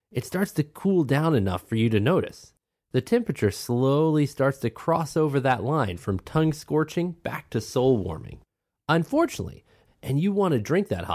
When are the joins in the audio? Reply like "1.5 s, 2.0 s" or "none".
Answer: 9.9 s